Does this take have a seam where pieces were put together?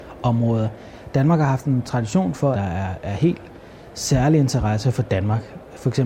yes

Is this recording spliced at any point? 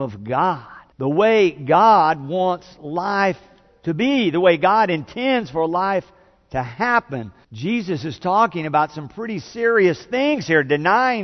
yes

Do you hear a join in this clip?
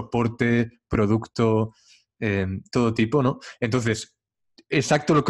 no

